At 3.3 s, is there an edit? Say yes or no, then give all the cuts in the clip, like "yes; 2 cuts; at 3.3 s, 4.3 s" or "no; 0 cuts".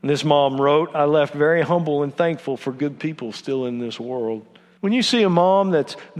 no; 1 cut; at 4.8 s